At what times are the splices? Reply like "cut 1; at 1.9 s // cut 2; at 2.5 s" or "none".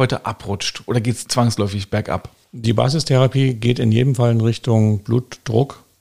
none